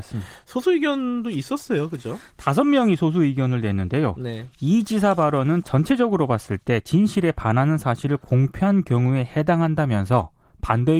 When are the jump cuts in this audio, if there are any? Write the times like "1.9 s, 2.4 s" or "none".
none